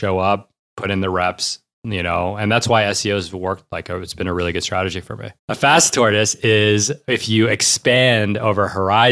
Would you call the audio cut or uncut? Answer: cut